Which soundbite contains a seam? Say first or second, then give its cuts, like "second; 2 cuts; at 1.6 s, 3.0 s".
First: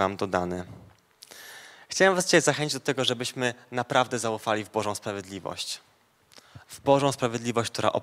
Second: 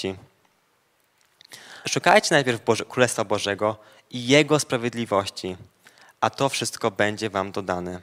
second; 1 cut; at 1.8 s